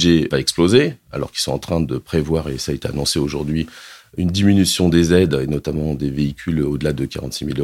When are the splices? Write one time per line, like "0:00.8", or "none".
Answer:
none